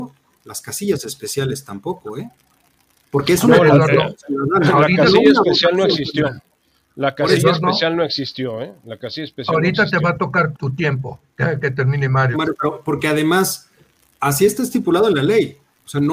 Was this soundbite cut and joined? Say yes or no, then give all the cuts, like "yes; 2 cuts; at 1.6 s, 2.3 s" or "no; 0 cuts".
yes; 2 cuts; at 10.5 s, 12.3 s